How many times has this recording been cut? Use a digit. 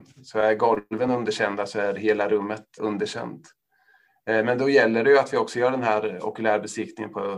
1